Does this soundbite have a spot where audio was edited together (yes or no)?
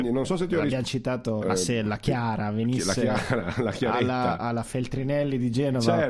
yes